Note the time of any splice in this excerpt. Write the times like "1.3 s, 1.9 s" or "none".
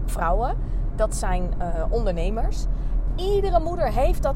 3.1 s